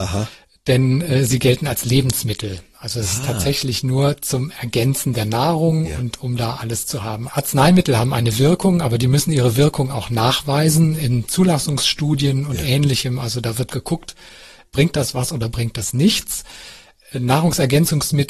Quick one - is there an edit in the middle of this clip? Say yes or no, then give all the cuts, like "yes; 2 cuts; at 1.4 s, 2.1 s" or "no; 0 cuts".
no; 0 cuts